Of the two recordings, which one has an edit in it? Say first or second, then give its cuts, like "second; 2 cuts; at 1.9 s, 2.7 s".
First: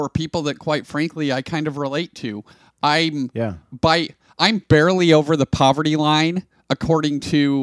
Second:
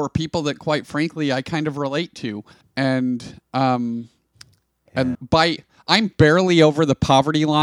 second; 2 cuts; at 2.6 s, 5.1 s